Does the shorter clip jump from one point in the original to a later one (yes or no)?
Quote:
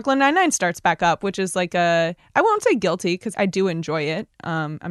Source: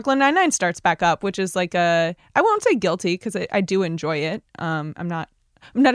yes